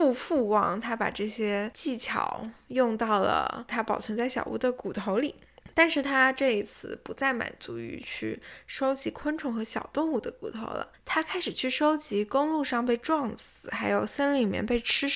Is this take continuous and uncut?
yes; 0 cuts

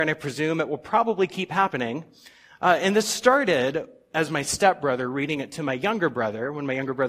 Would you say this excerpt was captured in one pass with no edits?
yes; 0 cuts

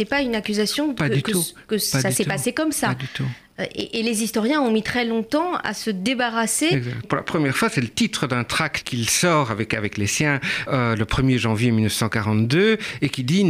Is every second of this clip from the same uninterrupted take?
no; 1 cut; at 7.0 s

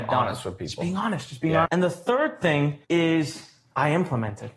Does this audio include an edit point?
yes; 2 cuts; at 1.7 s, 2.8 s

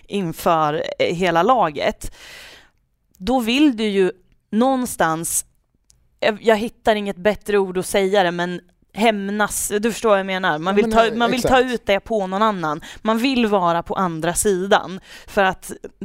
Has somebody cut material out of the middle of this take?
no; 0 cuts

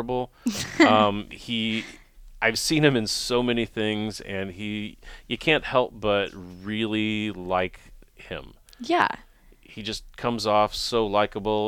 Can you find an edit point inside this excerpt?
no; 0 cuts

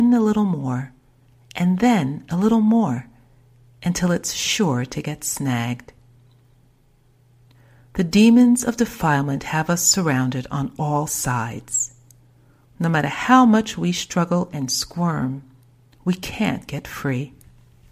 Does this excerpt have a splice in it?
yes; 1 cut; at 12.7 s

